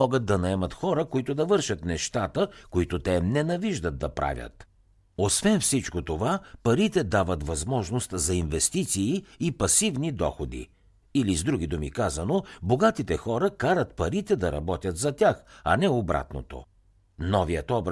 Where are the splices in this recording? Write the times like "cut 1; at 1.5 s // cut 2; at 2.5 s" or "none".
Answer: none